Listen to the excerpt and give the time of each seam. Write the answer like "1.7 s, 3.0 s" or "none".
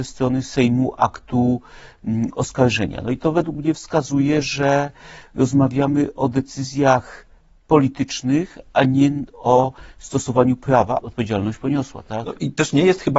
11.0 s